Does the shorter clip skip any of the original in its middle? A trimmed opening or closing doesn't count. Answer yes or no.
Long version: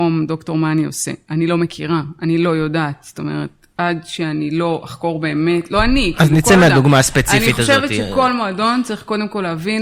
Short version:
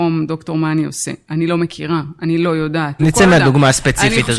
yes